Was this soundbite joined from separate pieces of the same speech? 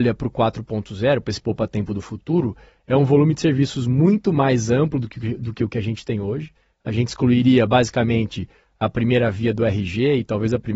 no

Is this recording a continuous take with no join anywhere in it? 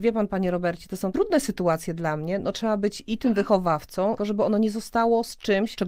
no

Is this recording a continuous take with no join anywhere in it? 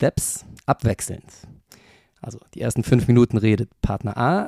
yes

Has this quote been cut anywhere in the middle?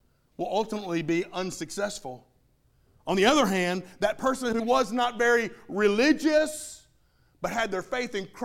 yes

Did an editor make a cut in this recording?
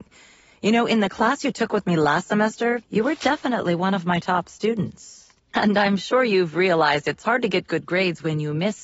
yes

